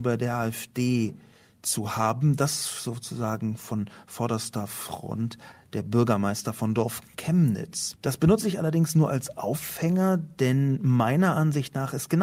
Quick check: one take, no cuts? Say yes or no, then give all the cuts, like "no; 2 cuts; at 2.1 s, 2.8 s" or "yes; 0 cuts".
yes; 0 cuts